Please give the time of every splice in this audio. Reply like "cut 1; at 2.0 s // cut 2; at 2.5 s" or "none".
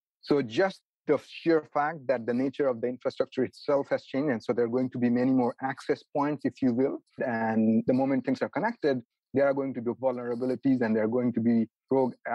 cut 1; at 7.2 s